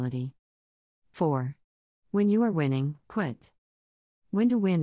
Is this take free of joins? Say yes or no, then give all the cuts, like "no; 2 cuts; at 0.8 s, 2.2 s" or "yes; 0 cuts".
yes; 0 cuts